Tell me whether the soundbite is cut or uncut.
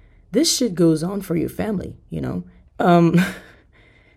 cut